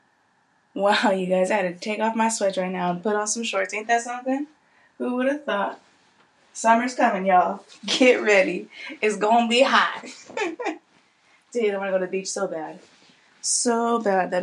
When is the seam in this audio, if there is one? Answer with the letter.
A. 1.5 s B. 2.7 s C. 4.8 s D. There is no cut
A